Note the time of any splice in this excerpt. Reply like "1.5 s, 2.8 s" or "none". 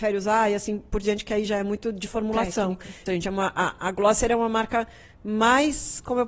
3.1 s